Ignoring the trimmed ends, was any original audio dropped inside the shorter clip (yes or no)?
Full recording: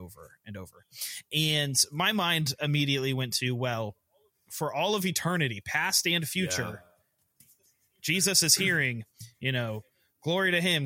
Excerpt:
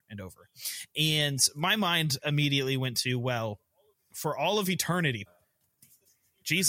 yes